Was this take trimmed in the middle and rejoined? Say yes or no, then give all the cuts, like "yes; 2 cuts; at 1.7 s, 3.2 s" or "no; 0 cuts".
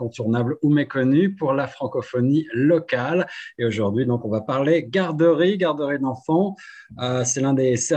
no; 0 cuts